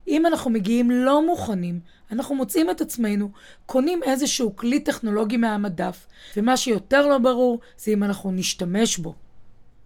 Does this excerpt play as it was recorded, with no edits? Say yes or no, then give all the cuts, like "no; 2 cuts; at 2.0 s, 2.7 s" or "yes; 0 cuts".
no; 1 cut; at 6.3 s